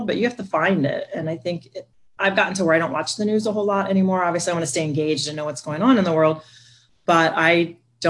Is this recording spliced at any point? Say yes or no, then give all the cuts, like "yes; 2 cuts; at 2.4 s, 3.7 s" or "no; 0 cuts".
no; 0 cuts